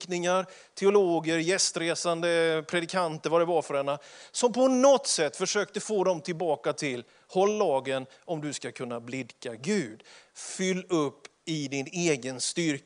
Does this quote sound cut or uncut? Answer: uncut